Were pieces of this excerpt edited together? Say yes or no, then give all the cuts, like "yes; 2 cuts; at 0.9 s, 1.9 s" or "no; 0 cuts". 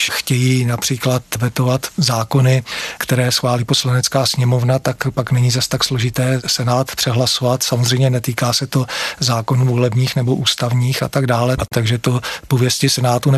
yes; 1 cut; at 11.6 s